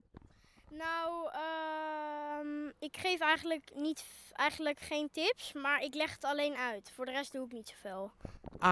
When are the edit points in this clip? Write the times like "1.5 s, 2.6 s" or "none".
none